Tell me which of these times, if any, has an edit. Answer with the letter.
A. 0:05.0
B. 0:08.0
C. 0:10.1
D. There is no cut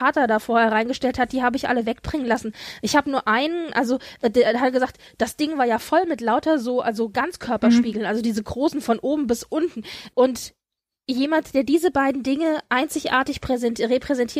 C